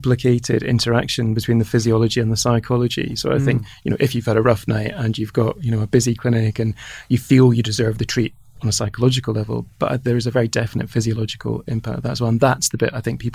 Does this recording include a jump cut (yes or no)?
no